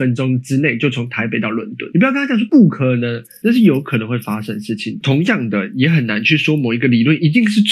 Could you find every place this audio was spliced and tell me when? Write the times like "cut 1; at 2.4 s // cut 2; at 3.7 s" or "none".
cut 1; at 5.0 s